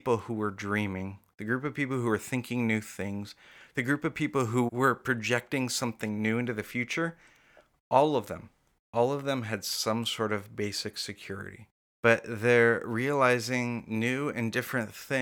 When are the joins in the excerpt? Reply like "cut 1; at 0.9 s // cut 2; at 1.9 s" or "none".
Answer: cut 1; at 4.7 s // cut 2; at 11.9 s